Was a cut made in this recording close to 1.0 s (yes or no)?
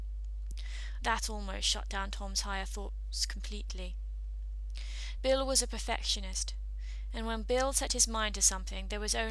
yes